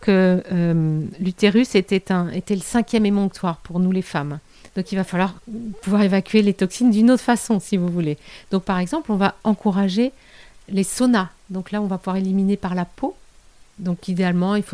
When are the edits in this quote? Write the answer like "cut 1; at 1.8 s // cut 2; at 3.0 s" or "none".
cut 1; at 4.7 s